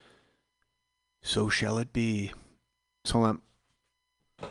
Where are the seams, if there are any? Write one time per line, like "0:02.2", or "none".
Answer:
0:03.1